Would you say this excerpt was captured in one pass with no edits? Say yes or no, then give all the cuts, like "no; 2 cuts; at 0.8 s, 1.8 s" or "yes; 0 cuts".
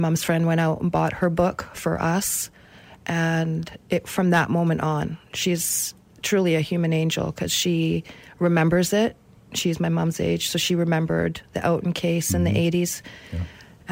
yes; 0 cuts